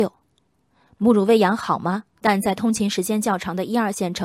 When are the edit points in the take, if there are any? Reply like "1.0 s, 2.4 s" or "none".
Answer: 2.2 s